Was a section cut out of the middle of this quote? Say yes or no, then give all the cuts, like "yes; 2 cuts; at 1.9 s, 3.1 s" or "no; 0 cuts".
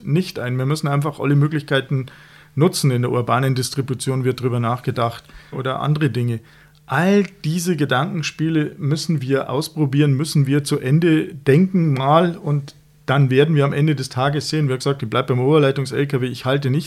yes; 1 cut; at 5.5 s